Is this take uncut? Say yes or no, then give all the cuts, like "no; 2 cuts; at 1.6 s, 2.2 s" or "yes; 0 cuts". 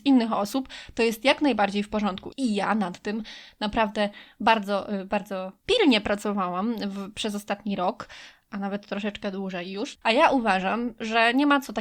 no; 2 cuts; at 2.3 s, 10.0 s